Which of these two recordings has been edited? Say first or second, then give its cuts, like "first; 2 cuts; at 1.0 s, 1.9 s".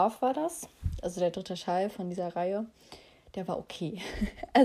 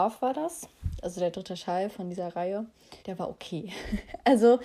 second; 1 cut; at 3.0 s